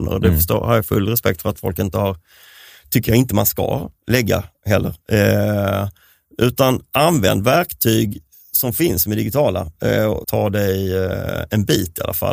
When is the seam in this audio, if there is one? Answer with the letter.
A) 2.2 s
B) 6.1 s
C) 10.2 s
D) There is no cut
C